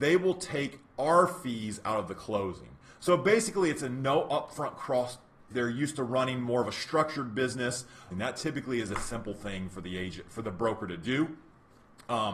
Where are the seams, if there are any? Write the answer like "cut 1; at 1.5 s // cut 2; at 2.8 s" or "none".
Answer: cut 1; at 5.5 s // cut 2; at 8.1 s